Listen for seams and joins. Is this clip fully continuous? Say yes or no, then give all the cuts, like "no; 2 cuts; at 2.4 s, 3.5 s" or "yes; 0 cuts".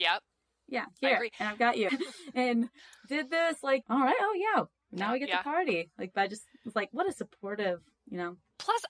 no; 2 cuts; at 1.9 s, 3.8 s